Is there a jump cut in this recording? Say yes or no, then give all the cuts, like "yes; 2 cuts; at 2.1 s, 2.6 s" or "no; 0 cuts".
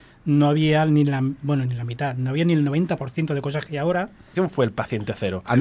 yes; 1 cut; at 4.3 s